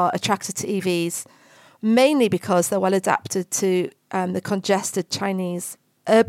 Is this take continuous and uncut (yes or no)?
yes